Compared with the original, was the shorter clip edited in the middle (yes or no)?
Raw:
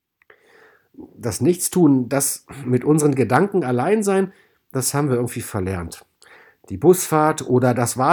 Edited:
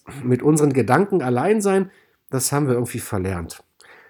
no